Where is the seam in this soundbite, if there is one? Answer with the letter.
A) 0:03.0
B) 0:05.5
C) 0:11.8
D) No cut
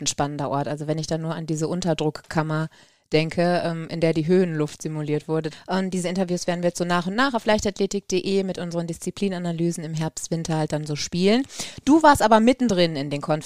B